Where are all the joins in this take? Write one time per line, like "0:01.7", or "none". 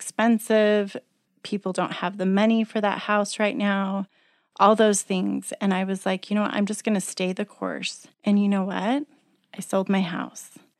0:08.1